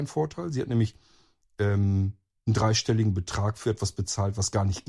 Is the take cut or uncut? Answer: uncut